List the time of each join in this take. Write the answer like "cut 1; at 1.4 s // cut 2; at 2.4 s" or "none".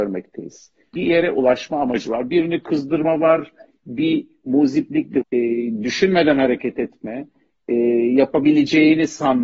cut 1; at 0.9 s // cut 2; at 5.2 s